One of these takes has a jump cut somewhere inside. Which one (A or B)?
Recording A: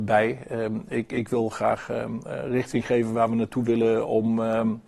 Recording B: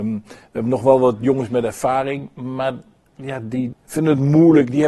B